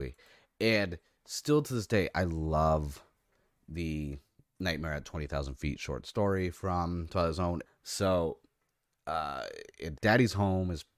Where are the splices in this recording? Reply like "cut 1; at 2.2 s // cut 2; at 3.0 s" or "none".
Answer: cut 1; at 7.6 s // cut 2; at 9.9 s